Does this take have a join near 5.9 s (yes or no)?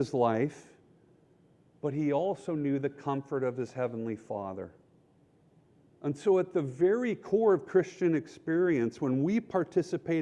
yes